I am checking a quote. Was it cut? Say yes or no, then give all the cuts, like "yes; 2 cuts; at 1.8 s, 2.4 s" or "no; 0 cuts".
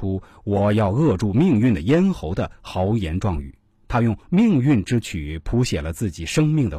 no; 0 cuts